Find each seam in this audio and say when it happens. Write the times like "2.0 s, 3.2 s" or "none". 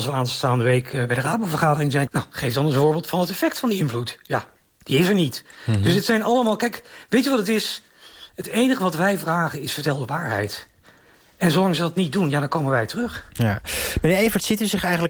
2.1 s